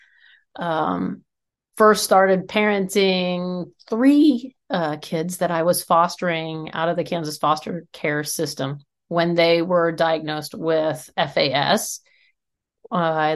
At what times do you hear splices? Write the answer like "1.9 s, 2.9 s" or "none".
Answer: none